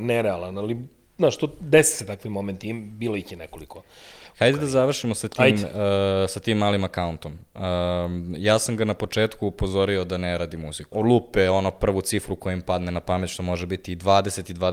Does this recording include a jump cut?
yes; 1 cut; at 10.9 s

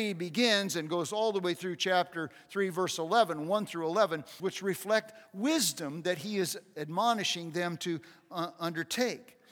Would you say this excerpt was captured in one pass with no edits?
no; 1 cut; at 4.4 s

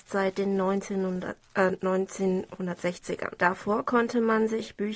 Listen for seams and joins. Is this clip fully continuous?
no; 1 cut; at 3.4 s

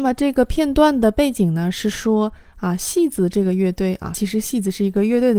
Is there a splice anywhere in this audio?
yes; 1 cut; at 4.1 s

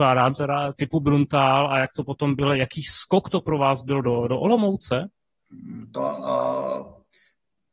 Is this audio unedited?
yes; 0 cuts

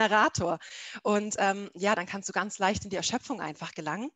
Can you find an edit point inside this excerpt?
no; 0 cuts

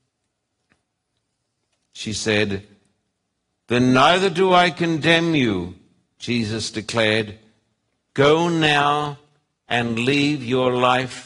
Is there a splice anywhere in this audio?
yes; 1 cut; at 1.8 s

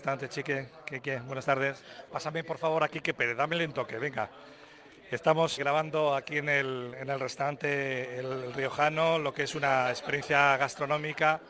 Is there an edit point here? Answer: yes; 2 cuts; at 2.1 s, 5.6 s

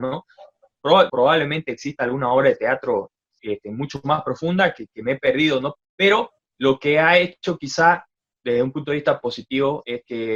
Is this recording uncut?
no; 2 cuts; at 1.1 s, 5.7 s

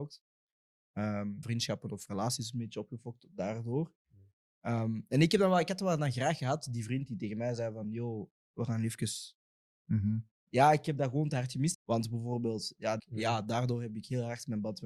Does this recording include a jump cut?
yes; 3 cuts; at 1.4 s, 11.7 s, 13.0 s

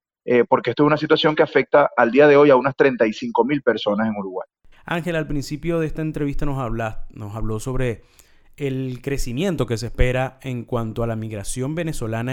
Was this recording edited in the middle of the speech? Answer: yes; 1 cut; at 4.7 s

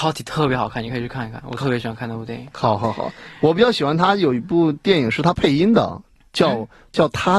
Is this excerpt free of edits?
yes; 0 cuts

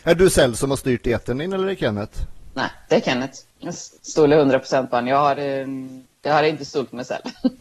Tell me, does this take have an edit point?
yes; 1 cut; at 3.5 s

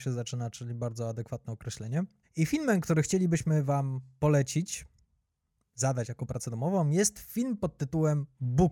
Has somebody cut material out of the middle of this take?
yes; 1 cut; at 2.2 s

